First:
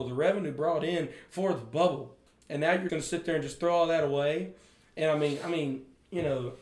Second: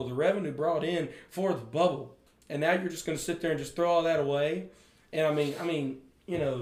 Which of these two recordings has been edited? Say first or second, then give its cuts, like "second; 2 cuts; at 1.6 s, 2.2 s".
first; 1 cut; at 2.9 s